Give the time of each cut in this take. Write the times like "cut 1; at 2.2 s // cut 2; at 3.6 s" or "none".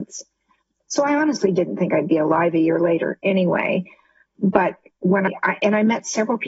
none